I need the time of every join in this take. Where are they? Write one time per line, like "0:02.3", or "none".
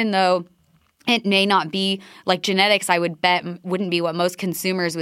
none

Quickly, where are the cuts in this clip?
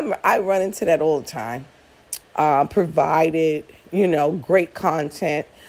0:02.2

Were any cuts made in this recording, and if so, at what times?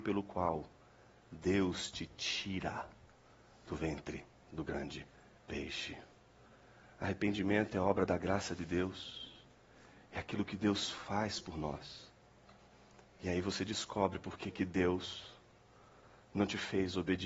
none

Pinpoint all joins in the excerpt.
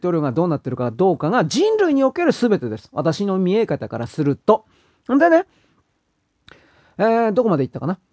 none

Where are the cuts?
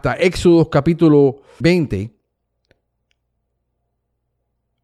0:01.6

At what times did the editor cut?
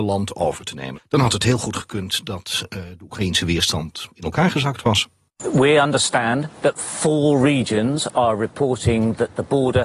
0:00.9

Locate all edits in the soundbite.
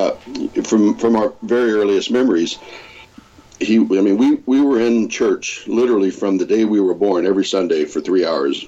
none

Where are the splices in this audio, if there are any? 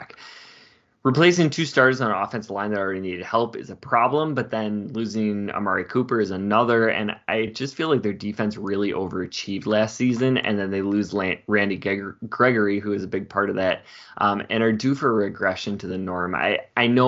none

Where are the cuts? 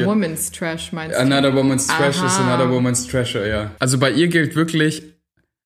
0:03.8

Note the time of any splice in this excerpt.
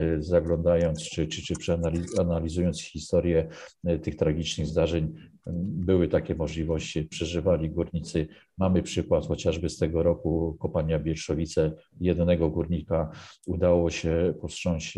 none

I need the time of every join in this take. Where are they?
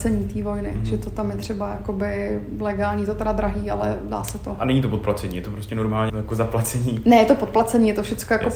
0:06.1

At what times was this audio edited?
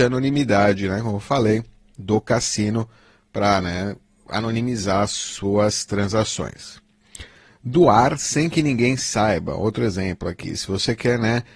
none

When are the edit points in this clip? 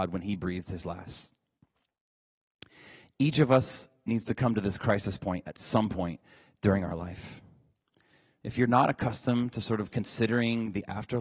none

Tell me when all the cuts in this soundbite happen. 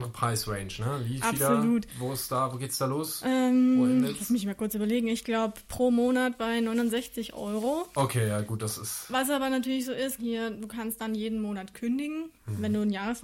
0:10.2

